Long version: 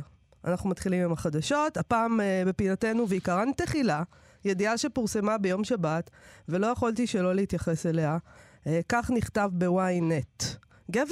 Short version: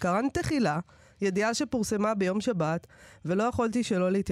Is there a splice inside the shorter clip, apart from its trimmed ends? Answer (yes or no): no